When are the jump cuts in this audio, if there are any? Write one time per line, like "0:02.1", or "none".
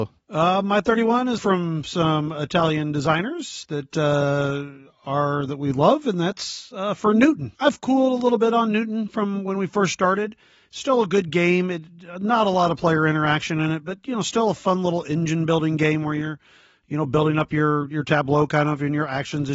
0:01.4